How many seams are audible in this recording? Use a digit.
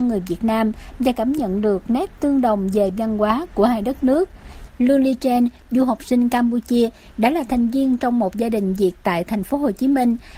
2